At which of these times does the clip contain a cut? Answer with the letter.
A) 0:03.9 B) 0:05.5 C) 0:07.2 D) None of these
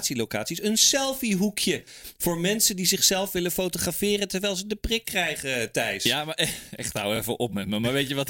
D